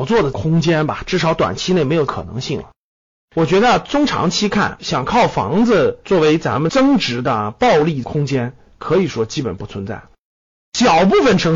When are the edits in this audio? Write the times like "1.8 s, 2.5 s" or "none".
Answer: none